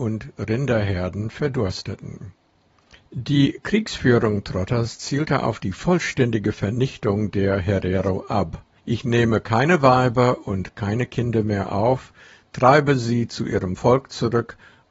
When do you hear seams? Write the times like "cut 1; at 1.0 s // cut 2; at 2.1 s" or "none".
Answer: cut 1; at 3.0 s // cut 2; at 8.8 s

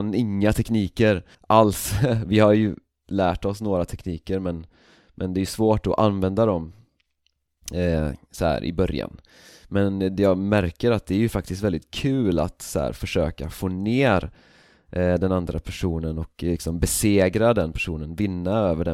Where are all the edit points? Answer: cut 1; at 1.3 s

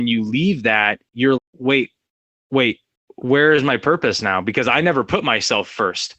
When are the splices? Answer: cut 1; at 1.4 s

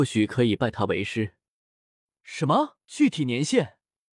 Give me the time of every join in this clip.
cut 1; at 2.8 s

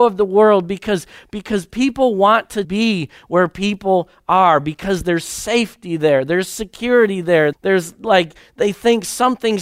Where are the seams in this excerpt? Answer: cut 1; at 2.6 s // cut 2; at 7.5 s

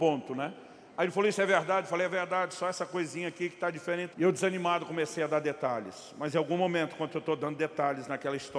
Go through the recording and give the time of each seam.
cut 1; at 4.1 s

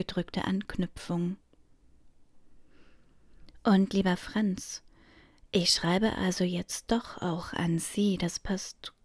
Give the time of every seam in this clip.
none

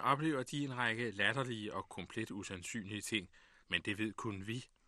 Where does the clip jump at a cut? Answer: cut 1; at 3.6 s

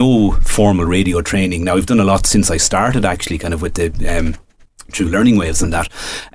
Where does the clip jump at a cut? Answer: none

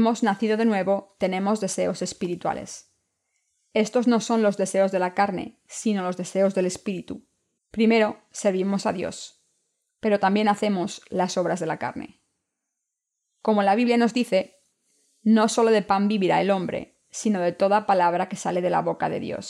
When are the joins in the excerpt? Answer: cut 1; at 7.6 s

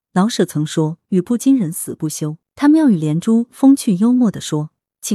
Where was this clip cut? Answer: cut 1; at 2.4 s

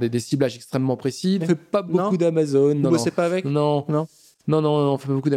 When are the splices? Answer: cut 1; at 1.4 s

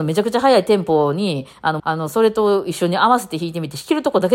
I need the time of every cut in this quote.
cut 1; at 1.8 s

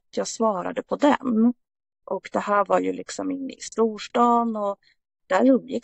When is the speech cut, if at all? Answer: cut 1; at 2.0 s

